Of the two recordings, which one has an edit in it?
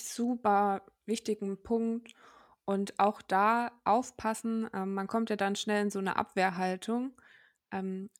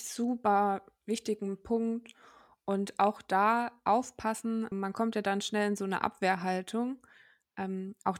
second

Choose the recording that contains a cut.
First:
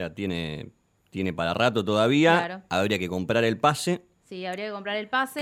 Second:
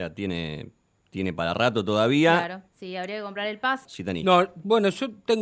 second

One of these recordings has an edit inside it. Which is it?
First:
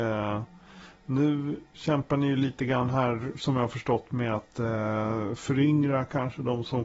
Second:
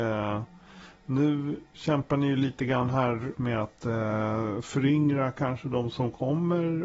second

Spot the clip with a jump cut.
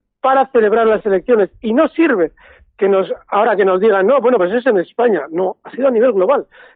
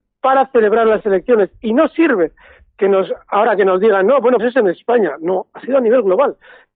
second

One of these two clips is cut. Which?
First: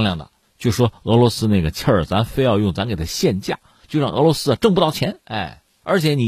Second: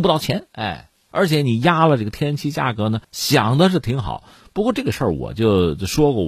second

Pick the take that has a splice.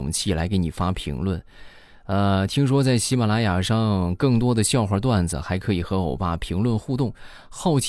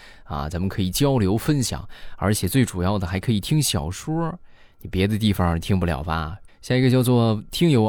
second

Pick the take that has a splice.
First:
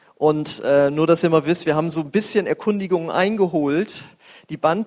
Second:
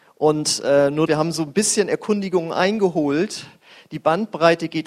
second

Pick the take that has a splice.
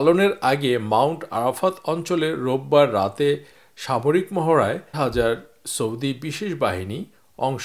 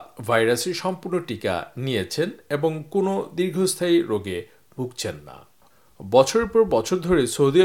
first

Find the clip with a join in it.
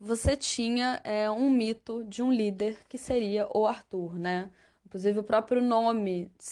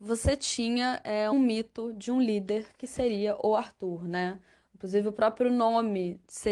second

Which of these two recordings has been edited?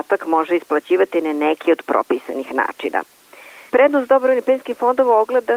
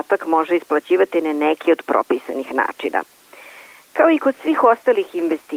first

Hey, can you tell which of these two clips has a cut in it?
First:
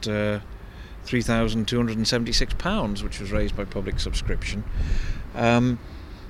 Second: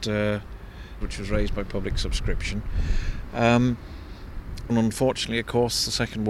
second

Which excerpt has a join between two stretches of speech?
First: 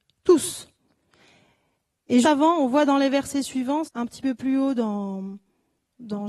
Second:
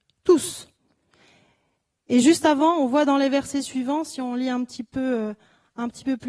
first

